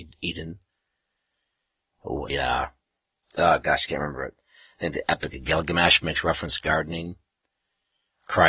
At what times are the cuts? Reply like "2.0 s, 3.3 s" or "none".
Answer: 2.3 s